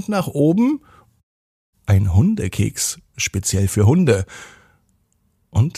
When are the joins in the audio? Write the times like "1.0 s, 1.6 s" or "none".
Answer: 1.7 s